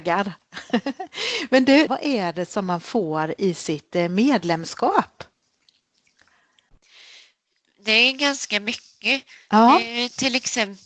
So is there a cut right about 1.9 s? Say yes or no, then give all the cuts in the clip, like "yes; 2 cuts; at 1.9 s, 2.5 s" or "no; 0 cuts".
yes; 1 cut; at 1.9 s